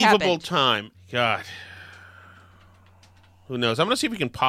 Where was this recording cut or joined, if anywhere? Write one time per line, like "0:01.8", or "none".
0:00.9